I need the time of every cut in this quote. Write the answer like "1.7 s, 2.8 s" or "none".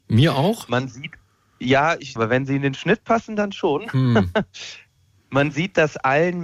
2.2 s